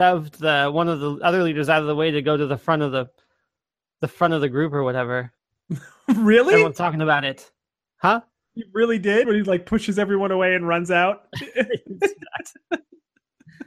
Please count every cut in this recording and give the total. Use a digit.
2